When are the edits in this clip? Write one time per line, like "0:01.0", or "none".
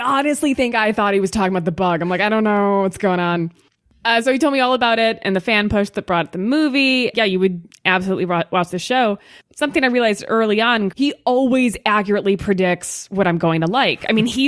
0:07.1
0:10.9